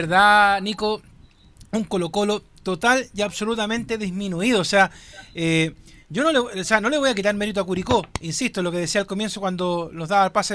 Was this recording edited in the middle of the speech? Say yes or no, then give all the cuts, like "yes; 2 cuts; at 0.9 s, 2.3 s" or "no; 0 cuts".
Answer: no; 0 cuts